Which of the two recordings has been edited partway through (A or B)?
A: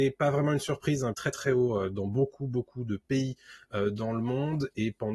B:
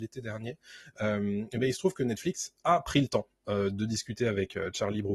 A